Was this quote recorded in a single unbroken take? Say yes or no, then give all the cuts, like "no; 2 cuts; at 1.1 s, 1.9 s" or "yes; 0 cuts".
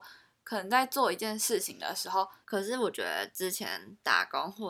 no; 1 cut; at 2.4 s